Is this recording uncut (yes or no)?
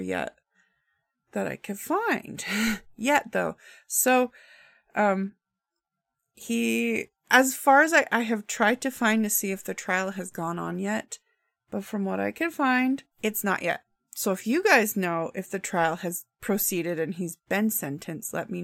no